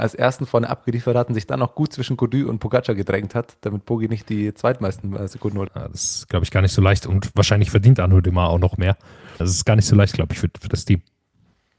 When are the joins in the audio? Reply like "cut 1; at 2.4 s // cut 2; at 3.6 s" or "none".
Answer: cut 1; at 5.7 s // cut 2; at 9.4 s